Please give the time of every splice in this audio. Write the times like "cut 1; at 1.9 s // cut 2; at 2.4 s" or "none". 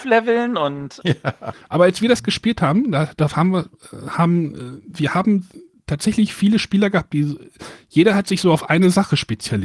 cut 1; at 1.0 s